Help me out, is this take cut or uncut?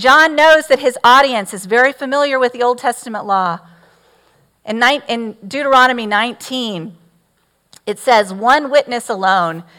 uncut